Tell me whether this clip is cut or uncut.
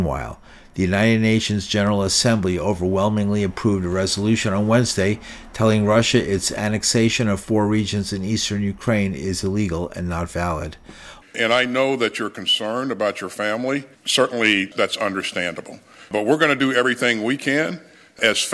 cut